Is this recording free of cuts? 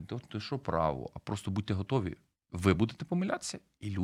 yes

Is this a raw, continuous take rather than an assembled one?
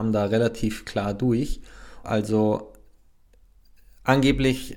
no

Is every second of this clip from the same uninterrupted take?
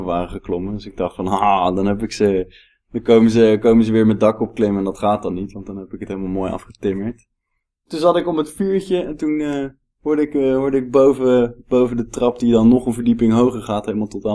yes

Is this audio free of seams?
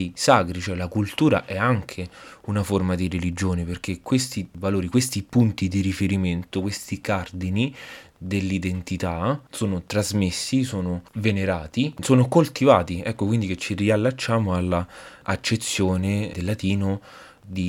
yes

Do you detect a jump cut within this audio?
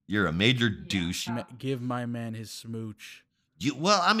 yes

